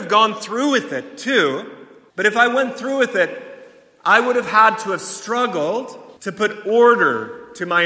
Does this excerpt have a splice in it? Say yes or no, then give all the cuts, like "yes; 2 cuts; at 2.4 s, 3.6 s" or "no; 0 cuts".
yes; 2 cuts; at 2.1 s, 6.2 s